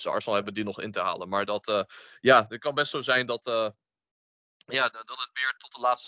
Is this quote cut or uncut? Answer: uncut